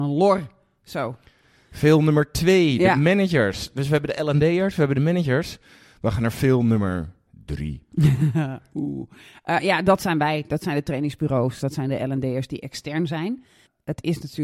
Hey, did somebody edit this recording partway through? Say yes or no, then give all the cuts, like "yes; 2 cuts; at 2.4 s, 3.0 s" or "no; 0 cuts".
no; 0 cuts